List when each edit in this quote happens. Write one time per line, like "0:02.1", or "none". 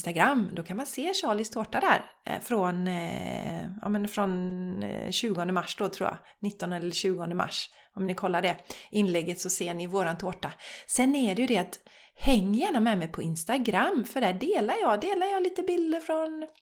none

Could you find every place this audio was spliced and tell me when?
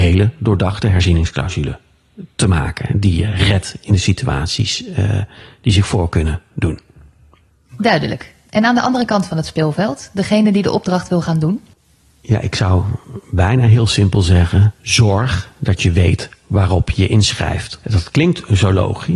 none

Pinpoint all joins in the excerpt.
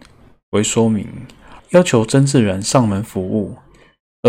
0:01.6

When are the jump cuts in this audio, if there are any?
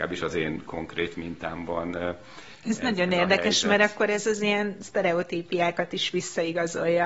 none

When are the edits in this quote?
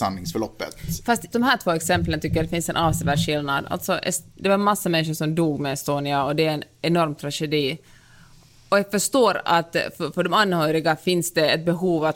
0:01.3

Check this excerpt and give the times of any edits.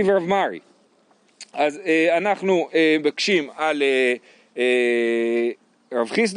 none

